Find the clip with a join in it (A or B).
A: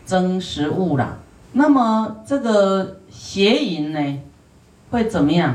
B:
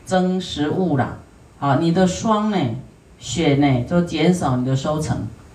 A